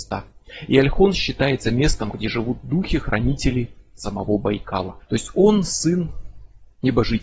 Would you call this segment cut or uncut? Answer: cut